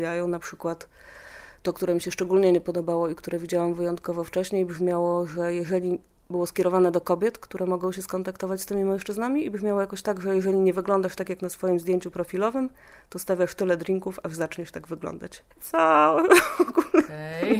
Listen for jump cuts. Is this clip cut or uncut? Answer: cut